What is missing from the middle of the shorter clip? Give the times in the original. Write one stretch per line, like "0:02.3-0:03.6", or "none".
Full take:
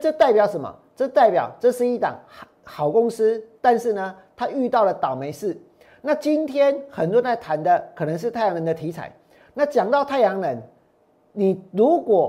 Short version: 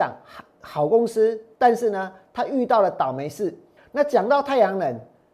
0:05.8-0:09.4